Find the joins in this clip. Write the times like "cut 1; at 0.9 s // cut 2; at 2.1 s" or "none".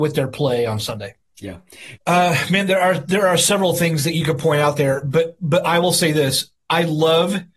cut 1; at 2.0 s